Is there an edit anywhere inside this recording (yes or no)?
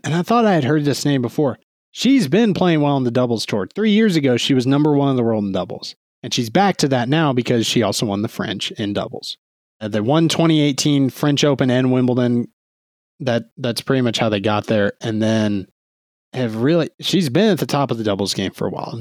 no